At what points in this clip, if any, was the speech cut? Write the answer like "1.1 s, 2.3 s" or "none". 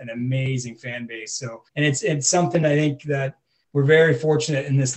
1.7 s